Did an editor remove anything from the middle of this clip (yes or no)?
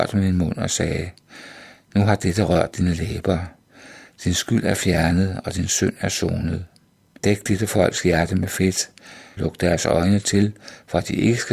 yes